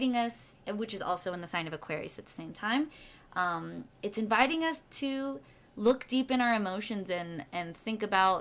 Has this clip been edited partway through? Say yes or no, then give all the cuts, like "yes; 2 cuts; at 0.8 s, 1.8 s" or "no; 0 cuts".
no; 0 cuts